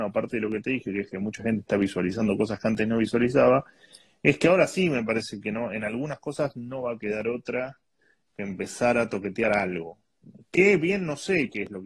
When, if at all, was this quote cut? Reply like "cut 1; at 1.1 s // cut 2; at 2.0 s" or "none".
none